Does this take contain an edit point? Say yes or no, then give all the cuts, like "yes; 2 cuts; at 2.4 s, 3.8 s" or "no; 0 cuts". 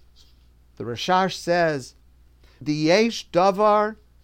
yes; 1 cut; at 2.6 s